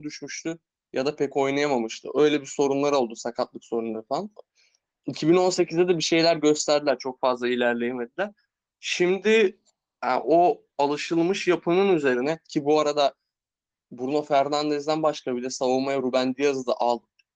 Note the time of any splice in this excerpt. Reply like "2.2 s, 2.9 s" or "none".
none